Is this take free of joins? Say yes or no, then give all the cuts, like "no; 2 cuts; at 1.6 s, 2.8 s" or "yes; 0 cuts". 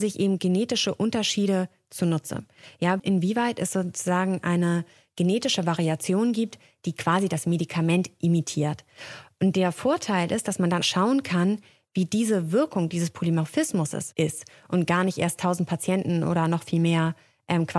no; 2 cuts; at 3.0 s, 10.8 s